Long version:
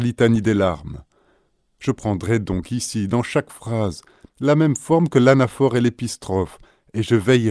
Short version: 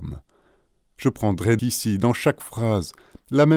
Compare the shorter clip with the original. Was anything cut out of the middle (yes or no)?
yes